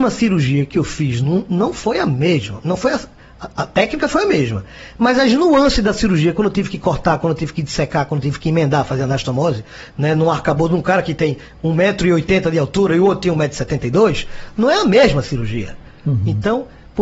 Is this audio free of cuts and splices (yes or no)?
yes